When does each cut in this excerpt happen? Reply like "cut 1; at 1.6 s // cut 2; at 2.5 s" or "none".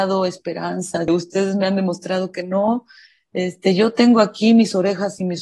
cut 1; at 1.1 s